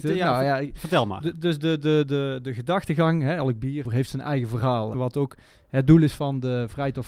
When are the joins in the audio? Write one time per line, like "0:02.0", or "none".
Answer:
0:03.8
0:04.9